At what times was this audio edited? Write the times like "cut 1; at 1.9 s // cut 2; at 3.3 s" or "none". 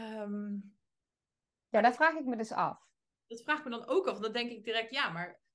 none